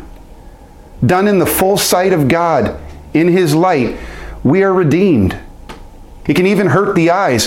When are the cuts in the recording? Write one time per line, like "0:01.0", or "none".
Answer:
0:01.0
0:06.3